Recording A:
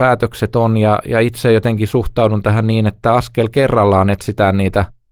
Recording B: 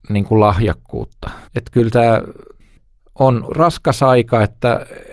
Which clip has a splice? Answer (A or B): B